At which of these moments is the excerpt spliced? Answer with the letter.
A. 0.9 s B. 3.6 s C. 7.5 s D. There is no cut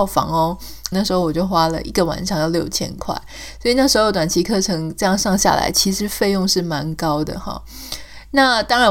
A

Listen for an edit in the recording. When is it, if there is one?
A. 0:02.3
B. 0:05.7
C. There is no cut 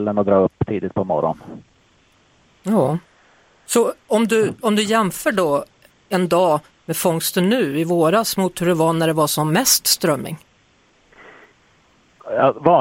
C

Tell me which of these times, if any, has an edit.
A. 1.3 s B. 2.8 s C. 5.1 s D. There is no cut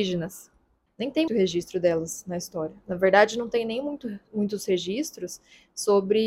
A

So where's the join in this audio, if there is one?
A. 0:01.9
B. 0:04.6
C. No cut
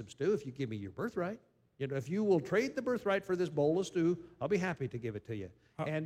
C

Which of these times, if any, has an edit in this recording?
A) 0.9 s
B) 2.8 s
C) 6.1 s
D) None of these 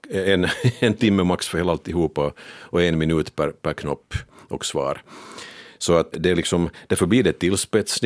C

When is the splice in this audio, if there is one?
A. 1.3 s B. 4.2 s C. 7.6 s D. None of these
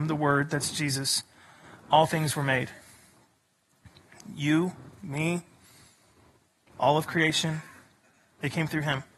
D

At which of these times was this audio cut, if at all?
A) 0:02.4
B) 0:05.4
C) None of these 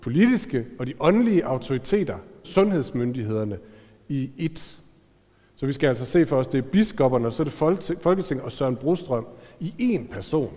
A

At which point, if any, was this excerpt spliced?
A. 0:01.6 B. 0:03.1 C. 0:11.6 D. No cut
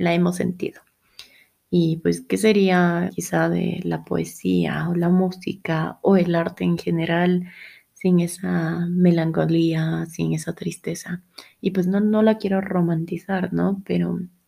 B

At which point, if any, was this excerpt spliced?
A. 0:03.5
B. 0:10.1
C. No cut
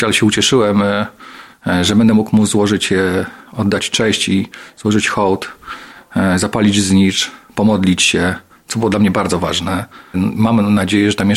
B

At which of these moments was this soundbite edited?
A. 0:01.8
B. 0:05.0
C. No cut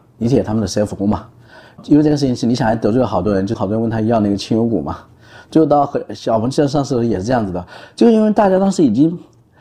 C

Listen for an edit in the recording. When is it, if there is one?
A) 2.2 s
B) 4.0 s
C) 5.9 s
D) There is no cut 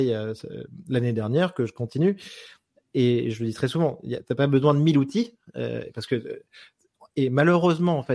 D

